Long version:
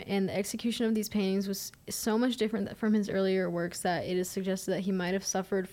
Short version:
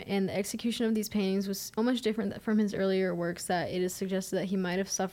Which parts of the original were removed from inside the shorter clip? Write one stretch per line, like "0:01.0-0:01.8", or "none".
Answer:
0:01.8-0:02.1